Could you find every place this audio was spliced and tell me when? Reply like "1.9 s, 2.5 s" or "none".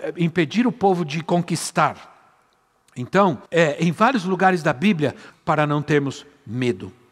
3.5 s, 5.3 s

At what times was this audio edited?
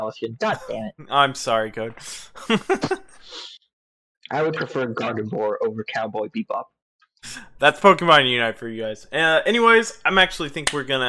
none

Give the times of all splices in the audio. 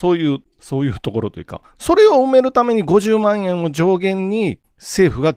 1.8 s

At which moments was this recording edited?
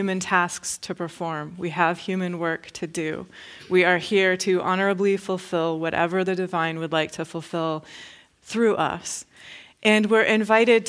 none

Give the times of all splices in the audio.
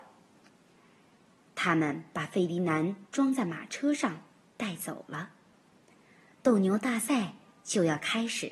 6.3 s

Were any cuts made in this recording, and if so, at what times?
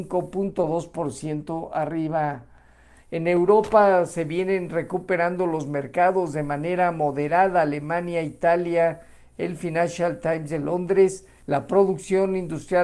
3.0 s, 11.4 s

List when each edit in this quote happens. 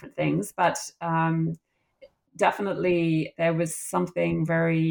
3.3 s

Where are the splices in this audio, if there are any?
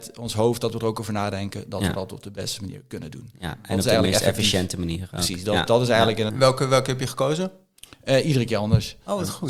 6.3 s

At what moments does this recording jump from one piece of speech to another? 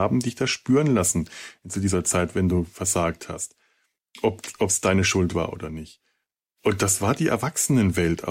none

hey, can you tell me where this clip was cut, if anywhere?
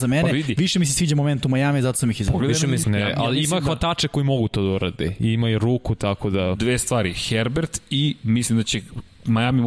2.8 s

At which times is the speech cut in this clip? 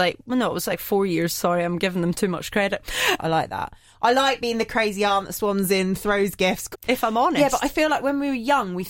3.2 s, 6.7 s

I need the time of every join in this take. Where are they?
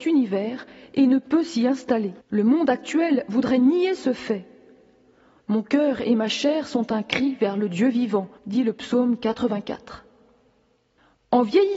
2.2 s, 5.4 s, 8.4 s

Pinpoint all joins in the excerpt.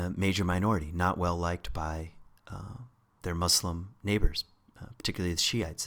none

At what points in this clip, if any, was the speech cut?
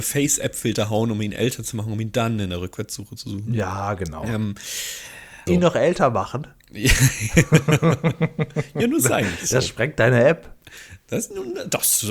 5.5 s

